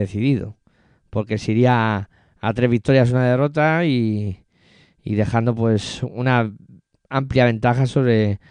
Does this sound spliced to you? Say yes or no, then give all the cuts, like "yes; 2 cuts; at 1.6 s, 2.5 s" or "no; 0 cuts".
no; 0 cuts